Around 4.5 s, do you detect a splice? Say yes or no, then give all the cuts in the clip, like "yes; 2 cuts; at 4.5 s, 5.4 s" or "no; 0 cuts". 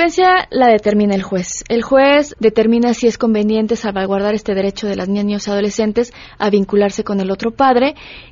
no; 1 cut; at 2.3 s